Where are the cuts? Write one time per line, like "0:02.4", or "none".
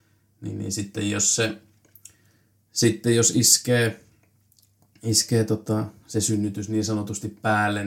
none